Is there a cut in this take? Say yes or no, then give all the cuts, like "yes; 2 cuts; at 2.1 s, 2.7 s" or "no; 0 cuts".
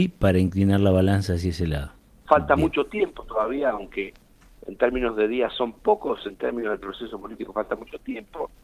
yes; 1 cut; at 2.3 s